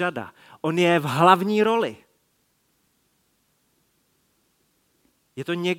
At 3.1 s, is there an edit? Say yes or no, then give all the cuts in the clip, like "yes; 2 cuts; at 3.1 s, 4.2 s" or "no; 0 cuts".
no; 0 cuts